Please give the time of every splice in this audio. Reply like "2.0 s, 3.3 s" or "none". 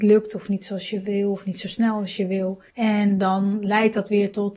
2.7 s